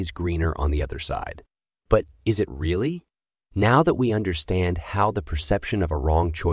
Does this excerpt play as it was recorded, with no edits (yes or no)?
yes